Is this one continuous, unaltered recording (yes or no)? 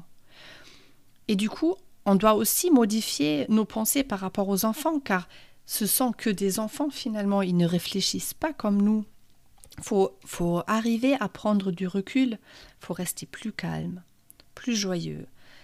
yes